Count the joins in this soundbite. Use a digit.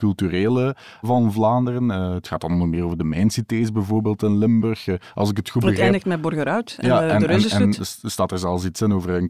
0